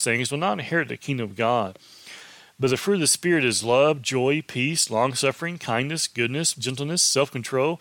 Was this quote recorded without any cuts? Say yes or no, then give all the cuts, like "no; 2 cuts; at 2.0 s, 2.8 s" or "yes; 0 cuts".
no; 1 cut; at 6.5 s